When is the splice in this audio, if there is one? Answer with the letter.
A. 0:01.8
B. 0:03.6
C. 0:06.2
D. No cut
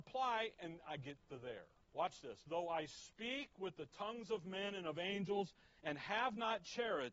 A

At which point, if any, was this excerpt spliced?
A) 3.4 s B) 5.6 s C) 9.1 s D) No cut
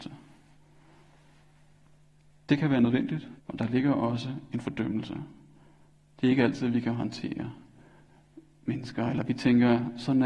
A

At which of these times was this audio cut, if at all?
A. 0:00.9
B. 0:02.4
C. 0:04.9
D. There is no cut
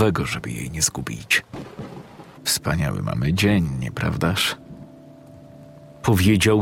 B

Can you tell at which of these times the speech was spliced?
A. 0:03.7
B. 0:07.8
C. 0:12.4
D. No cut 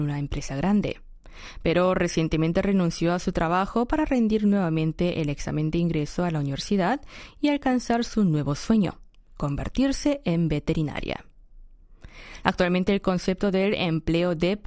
C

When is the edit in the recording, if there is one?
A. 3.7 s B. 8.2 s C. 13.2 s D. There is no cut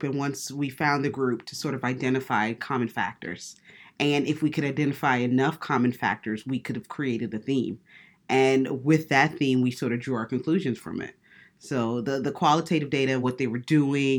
C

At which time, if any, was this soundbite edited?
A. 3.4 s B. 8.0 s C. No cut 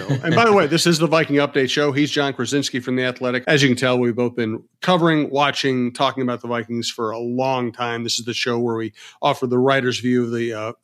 A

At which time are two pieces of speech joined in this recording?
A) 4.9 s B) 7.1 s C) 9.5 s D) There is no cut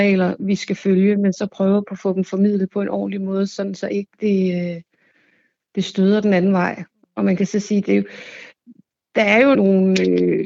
C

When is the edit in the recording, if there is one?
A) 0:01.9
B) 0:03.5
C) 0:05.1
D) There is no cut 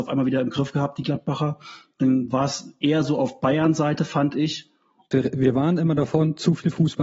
C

